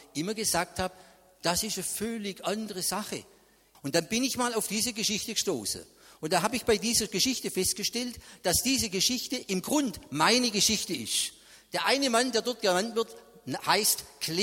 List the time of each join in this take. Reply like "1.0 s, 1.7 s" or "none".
3.7 s